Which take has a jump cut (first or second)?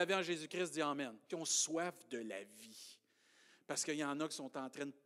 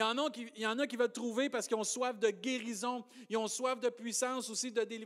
first